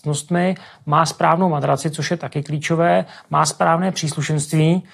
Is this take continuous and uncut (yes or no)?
yes